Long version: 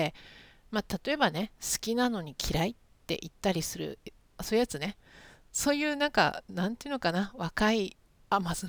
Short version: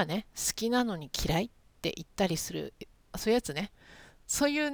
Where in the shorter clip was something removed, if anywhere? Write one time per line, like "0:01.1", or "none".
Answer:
none

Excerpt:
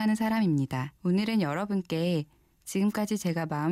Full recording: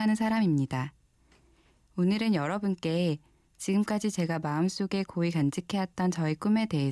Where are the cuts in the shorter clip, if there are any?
0:01.0

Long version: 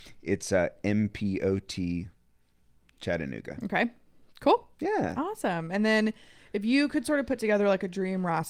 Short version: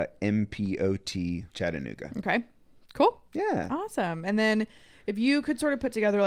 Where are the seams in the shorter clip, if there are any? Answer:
0:01.5

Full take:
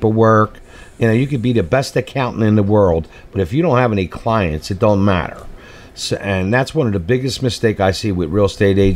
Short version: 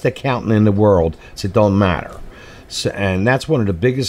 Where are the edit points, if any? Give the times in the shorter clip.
0:01.4

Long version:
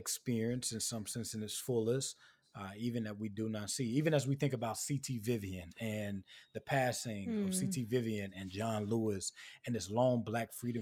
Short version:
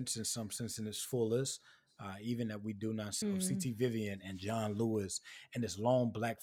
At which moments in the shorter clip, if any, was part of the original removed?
0:03.2

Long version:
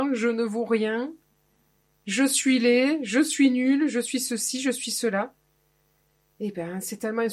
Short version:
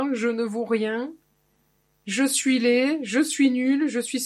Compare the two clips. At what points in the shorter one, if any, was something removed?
none

